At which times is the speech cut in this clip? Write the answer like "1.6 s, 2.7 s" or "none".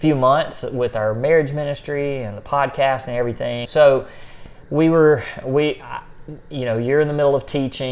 3.6 s